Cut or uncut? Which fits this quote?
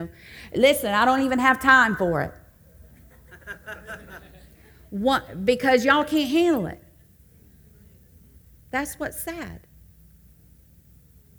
uncut